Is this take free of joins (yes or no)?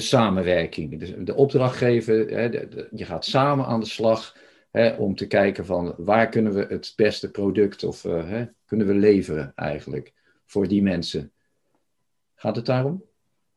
yes